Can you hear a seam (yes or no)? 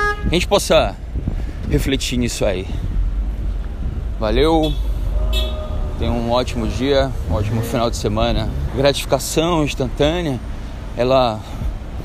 yes